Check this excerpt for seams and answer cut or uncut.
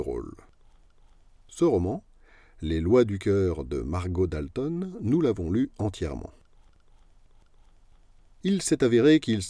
uncut